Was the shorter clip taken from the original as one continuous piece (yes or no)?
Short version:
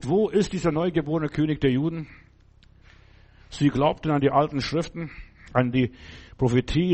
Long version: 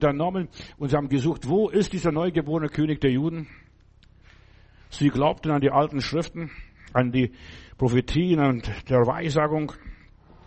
yes